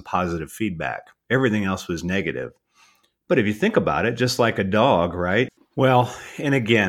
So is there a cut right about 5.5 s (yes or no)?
yes